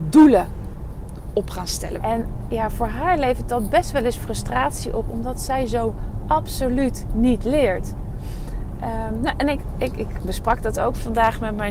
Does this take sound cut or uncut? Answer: cut